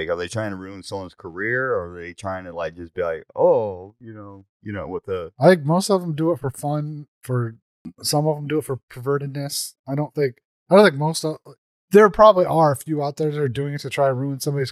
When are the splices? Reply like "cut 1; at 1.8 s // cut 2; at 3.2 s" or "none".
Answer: cut 1; at 4.5 s